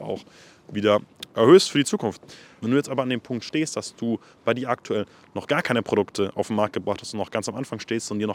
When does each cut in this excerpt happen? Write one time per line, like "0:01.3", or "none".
0:02.6